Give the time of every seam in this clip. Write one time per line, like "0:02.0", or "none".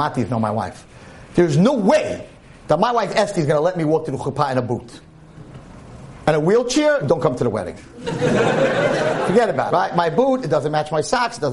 0:07.0
0:09.7